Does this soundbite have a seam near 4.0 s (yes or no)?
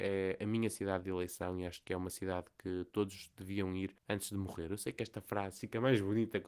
yes